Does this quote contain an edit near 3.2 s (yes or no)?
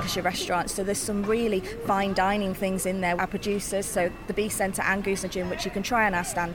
yes